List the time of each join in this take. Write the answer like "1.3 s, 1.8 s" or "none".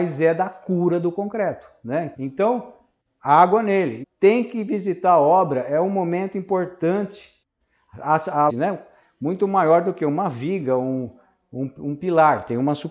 2.1 s, 4.0 s, 8.5 s